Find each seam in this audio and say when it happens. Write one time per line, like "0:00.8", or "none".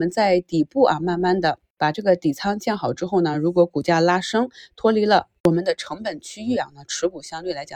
none